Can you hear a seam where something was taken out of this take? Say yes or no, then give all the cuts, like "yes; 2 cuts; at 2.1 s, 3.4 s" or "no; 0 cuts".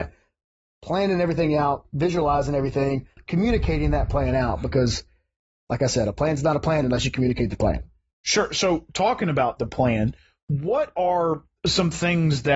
no; 0 cuts